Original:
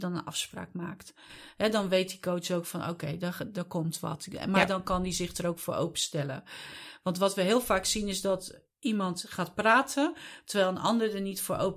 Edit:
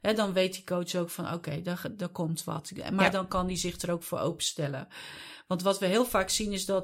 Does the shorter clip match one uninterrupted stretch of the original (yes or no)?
yes